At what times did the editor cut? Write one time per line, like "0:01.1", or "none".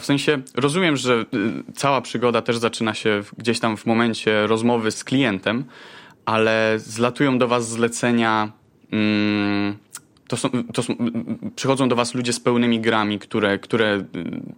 0:04.9